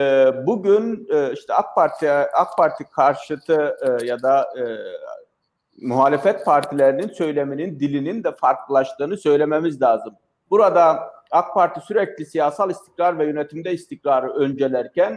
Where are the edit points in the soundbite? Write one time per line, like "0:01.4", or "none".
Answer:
none